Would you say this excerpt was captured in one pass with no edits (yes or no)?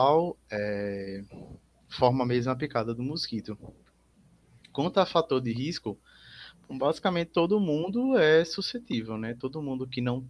yes